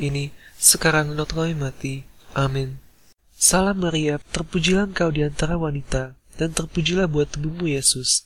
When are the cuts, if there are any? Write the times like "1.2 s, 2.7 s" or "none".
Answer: 4.2 s